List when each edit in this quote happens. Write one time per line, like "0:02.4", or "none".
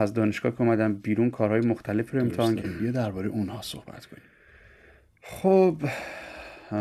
0:02.6

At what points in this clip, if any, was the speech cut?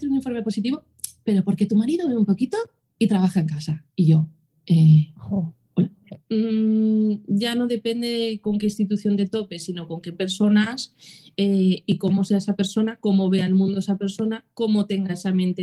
0:06.2

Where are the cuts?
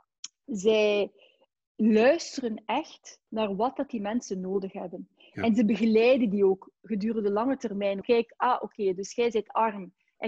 0:03.3
0:08.0

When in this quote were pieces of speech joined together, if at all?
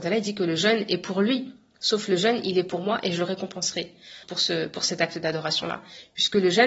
0:01.8
0:04.2

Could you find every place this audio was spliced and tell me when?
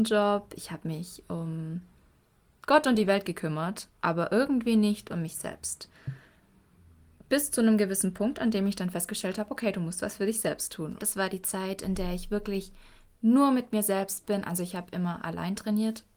0:11.0

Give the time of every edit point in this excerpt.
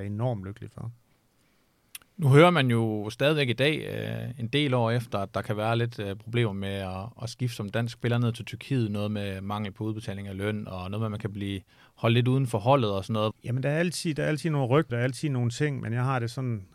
0:13.3
0:14.9

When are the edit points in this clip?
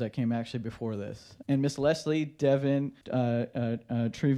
0:01.4
0:03.0

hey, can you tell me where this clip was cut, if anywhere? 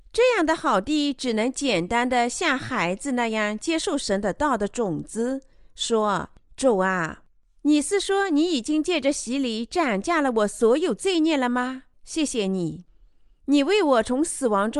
0:11.9

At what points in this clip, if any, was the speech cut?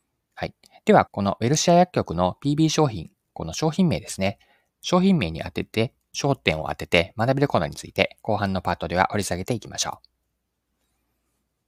0:01.1

